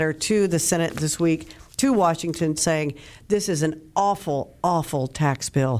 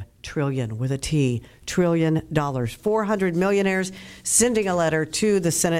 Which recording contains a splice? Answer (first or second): first